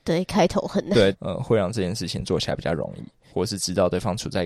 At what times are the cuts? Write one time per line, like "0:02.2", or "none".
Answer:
0:01.1
0:03.3